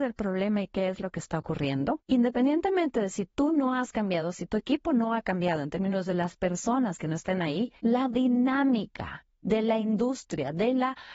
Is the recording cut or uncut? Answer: cut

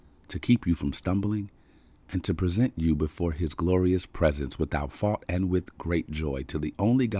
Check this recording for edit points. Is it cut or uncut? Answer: uncut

